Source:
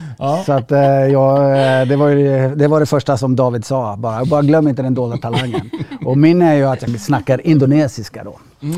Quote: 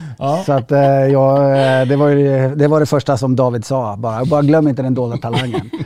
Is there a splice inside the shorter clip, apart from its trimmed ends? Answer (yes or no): no